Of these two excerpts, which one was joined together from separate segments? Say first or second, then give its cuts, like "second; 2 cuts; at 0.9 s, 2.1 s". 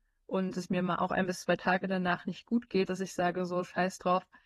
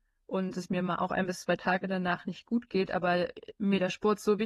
first; 1 cut; at 2.9 s